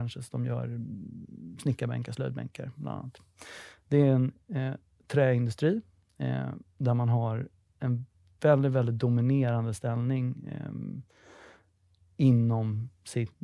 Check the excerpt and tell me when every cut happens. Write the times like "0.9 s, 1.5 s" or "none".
none